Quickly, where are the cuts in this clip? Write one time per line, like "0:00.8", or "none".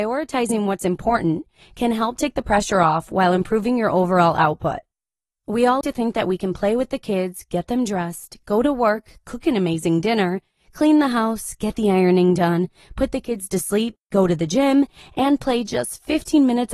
0:05.8